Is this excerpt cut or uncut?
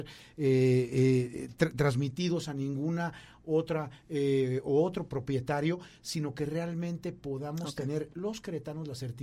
uncut